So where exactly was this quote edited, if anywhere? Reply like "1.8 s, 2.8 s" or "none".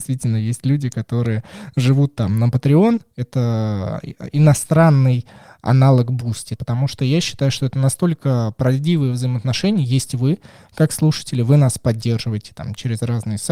6.6 s